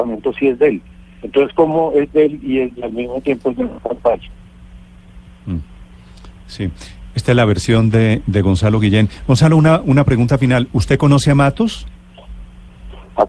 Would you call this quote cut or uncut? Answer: uncut